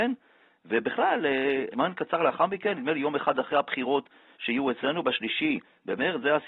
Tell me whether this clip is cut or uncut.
cut